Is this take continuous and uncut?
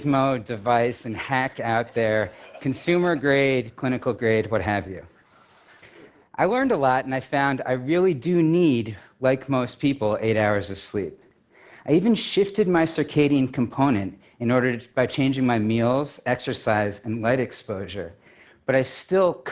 yes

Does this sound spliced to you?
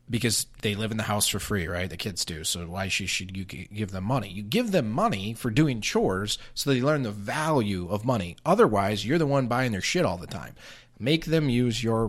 no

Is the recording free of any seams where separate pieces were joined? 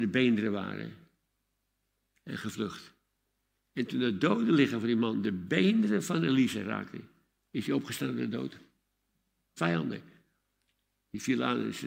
no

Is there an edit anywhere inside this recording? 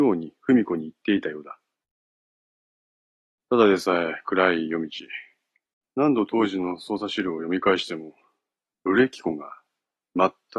yes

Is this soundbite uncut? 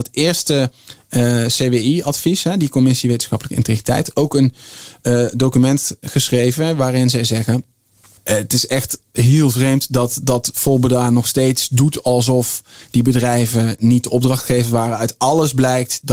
yes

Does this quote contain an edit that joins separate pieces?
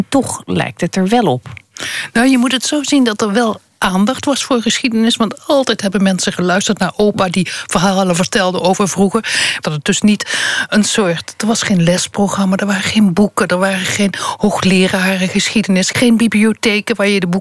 yes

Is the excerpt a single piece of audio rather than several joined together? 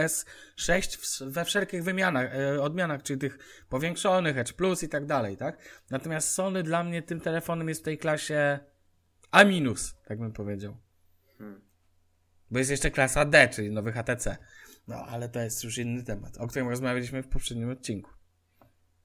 yes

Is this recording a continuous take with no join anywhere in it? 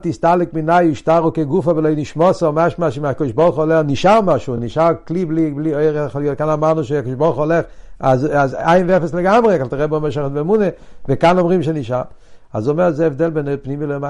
yes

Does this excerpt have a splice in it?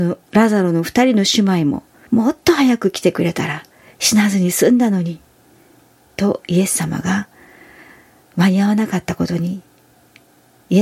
yes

